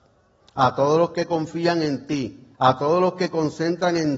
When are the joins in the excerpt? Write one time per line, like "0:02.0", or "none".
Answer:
0:02.5